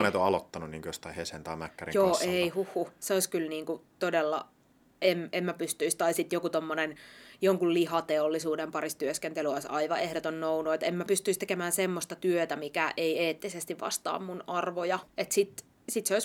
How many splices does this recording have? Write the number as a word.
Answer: one